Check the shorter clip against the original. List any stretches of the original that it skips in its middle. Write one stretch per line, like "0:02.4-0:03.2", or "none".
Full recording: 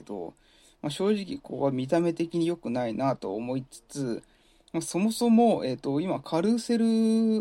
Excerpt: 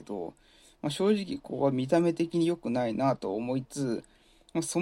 0:03.6-0:03.8